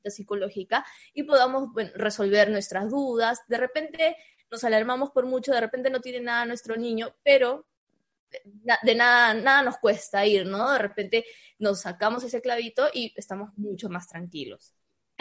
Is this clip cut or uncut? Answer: uncut